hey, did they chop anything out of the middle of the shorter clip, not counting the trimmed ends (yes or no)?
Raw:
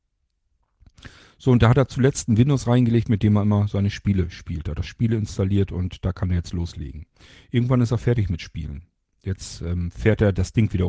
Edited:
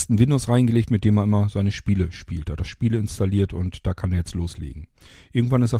no